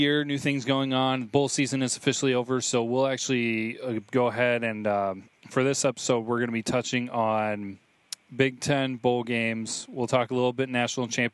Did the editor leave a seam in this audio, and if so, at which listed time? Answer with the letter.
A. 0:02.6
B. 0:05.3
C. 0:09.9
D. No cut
D